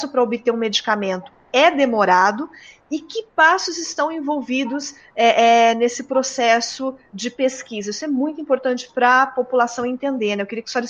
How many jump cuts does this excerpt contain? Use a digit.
0